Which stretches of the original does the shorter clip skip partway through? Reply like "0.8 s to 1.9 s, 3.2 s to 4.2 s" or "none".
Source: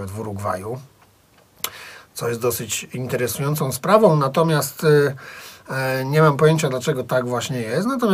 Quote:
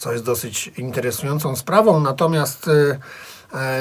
none